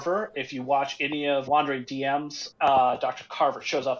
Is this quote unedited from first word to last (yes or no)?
no